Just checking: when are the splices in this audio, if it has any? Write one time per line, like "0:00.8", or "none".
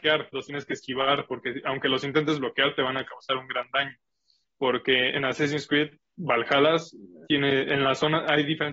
0:04.4
0:07.2